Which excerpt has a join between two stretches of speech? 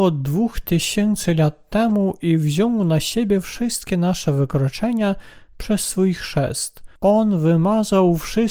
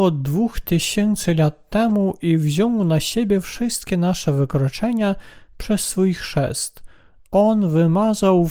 first; 1 cut; at 7.0 s

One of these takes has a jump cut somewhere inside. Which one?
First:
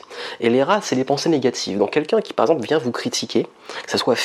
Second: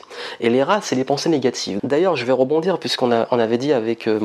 second; 1 cut; at 1.8 s

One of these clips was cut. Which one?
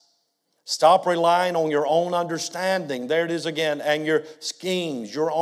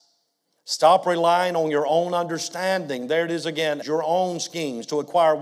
second; 1 cut; at 3.8 s

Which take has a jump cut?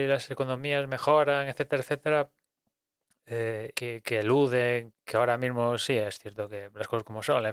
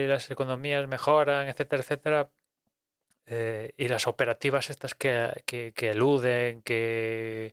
first; 2 cuts; at 3.7 s, 4.9 s

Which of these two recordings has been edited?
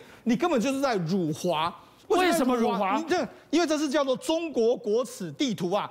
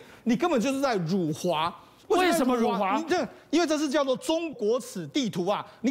second; 1 cut; at 4.5 s

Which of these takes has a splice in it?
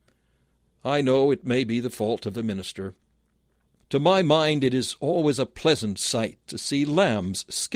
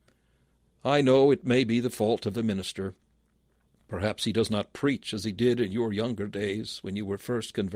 first; 1 cut; at 3.8 s

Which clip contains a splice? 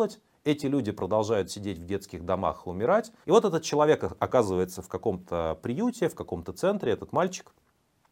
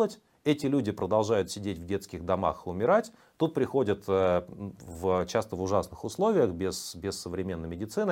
first; 1 cut; at 3.2 s

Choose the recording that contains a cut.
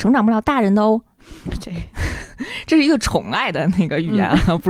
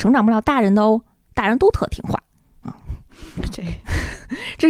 first; 1 cut; at 1.2 s

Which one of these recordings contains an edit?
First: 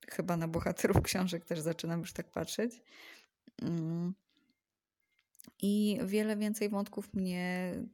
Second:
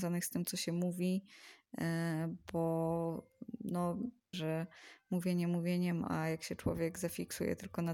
second; 2 cuts; at 4.3 s, 6.0 s

